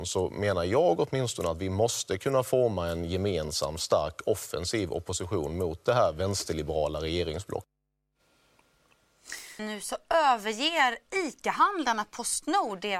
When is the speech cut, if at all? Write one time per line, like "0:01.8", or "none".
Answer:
0:09.6